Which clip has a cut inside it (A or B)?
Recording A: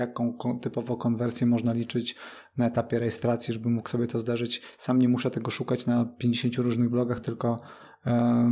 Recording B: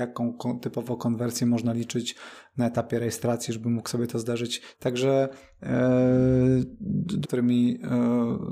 B